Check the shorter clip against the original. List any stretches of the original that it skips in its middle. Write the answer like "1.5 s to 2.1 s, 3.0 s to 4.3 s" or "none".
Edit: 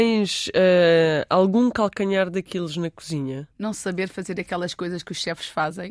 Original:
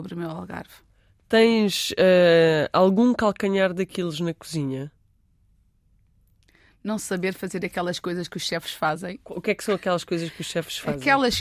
4.9 s to 6.8 s